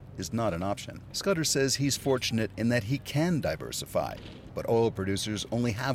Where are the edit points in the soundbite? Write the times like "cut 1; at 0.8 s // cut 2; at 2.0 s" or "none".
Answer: cut 1; at 1.1 s // cut 2; at 4.5 s